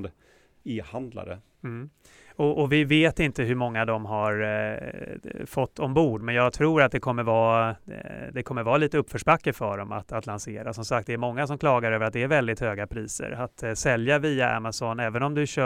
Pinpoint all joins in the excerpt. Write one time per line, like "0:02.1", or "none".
none